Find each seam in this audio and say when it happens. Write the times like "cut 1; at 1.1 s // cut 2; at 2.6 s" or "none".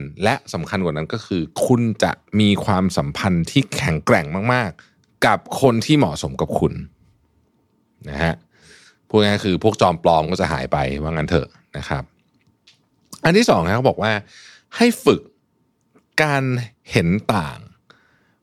cut 1; at 4.8 s